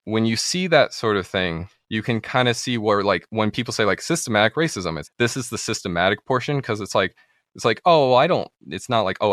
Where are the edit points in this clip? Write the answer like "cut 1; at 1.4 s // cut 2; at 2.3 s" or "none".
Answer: cut 1; at 5.0 s